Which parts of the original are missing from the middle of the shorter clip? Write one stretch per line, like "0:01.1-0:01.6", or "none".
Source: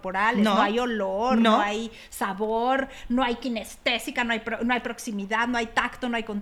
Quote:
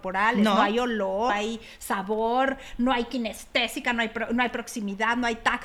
0:01.3-0:01.6